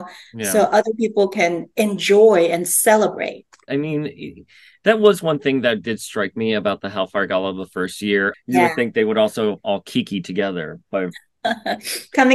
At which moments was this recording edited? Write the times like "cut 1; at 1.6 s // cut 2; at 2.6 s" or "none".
cut 1; at 3.7 s // cut 2; at 8.3 s